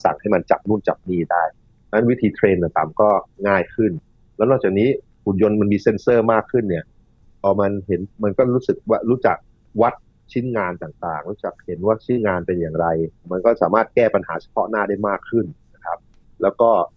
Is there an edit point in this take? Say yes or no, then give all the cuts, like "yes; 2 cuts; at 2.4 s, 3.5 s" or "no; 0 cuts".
no; 0 cuts